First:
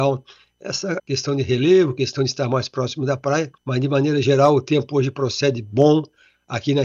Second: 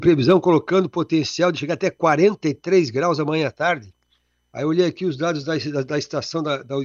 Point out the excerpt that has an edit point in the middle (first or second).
first